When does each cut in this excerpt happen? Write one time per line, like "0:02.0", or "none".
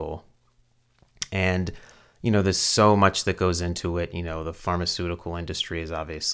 none